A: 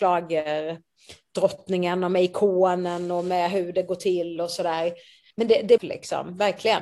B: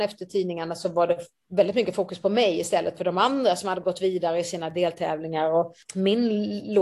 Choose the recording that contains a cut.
A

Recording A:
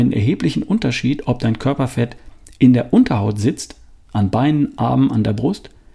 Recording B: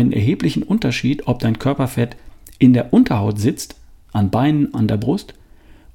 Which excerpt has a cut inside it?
B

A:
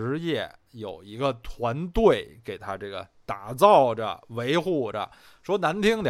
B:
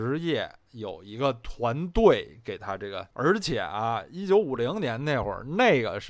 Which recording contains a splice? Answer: B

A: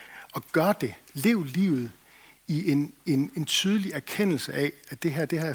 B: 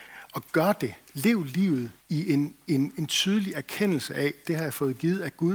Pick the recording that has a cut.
B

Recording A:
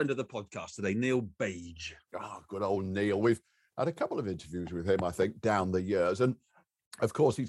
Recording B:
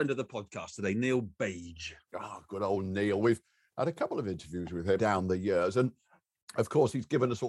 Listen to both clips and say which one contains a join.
B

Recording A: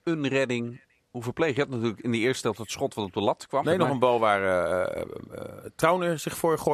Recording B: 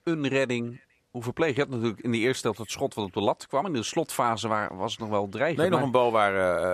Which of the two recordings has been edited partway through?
A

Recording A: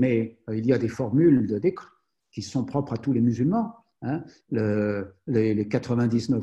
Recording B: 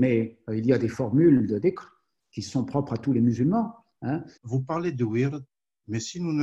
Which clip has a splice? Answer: B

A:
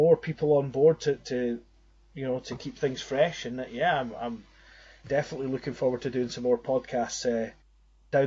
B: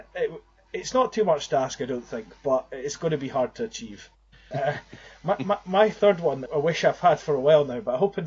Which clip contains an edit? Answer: B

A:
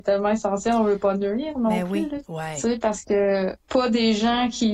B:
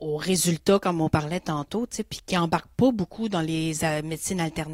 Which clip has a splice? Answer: A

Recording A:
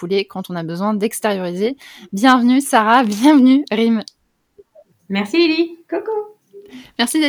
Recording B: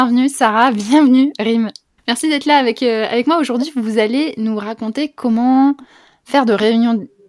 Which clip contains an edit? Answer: B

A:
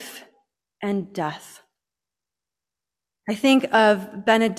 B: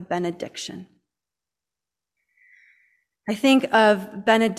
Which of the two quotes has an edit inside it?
A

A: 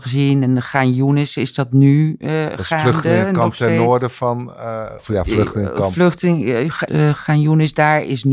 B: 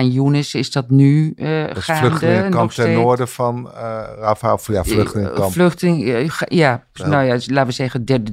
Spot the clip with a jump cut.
A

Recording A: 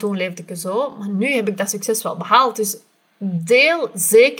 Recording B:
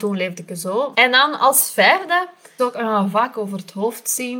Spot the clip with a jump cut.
B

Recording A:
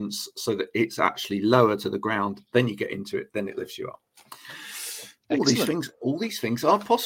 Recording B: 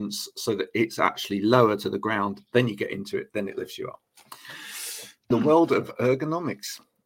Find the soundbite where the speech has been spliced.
B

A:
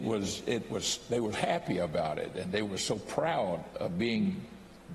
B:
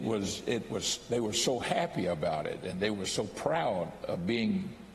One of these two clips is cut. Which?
A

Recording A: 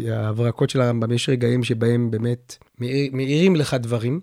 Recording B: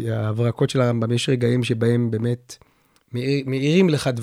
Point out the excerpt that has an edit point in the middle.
A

